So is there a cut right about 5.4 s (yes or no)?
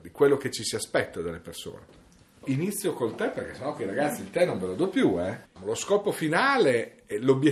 yes